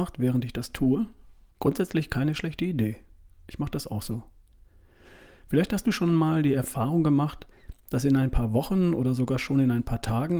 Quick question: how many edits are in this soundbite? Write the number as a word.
one